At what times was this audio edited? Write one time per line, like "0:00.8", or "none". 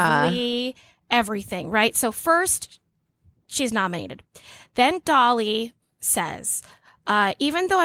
none